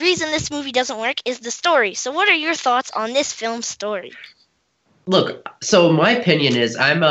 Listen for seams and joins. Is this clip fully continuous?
yes; 0 cuts

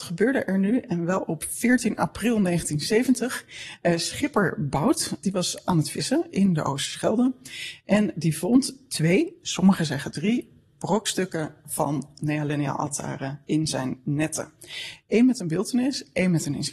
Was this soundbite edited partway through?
no; 0 cuts

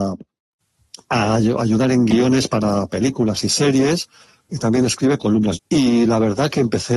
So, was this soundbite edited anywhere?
yes; 1 cut; at 5.6 s

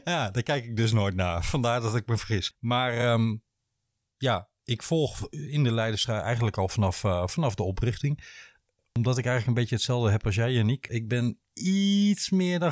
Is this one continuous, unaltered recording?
yes; 0 cuts

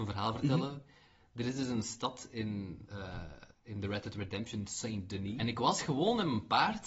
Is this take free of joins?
no; 2 cuts; at 3.5 s, 5.4 s

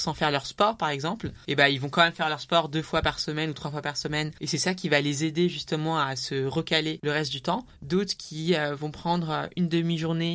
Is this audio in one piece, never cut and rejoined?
yes; 0 cuts

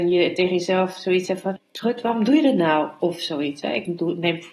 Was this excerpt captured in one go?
no; 1 cut; at 1.6 s

